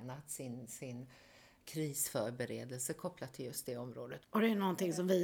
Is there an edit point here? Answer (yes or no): yes